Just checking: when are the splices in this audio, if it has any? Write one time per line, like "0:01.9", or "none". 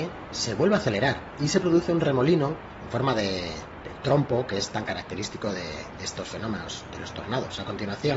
none